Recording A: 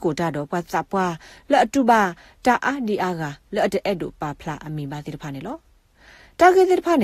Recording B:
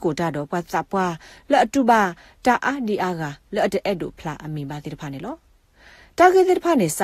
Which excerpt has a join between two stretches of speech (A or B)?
B